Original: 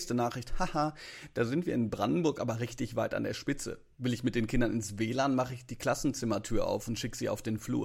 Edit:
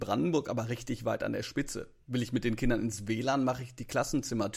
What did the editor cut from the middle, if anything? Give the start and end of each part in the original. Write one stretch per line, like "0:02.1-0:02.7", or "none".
none